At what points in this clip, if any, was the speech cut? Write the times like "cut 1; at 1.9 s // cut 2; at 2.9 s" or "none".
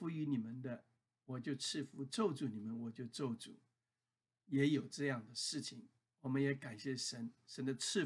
none